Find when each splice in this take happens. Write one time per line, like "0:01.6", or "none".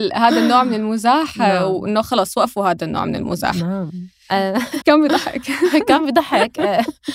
0:04.8